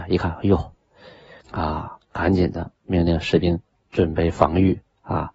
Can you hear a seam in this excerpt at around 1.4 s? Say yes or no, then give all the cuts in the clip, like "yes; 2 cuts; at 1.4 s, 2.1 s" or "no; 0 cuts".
yes; 1 cut; at 1.4 s